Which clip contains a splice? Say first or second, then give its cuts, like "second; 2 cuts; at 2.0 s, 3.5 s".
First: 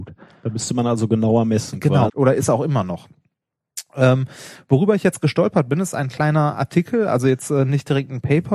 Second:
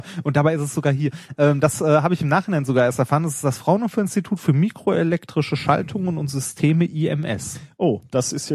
first; 1 cut; at 2.1 s